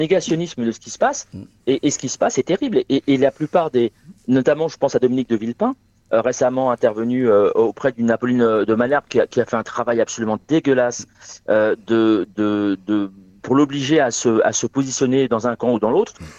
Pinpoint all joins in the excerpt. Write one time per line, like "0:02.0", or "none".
none